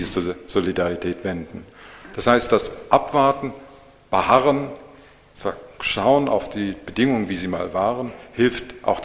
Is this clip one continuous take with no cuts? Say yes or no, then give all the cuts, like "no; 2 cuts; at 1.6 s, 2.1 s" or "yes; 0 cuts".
no; 1 cut; at 2.1 s